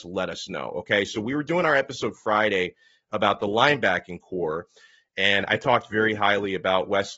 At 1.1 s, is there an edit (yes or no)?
no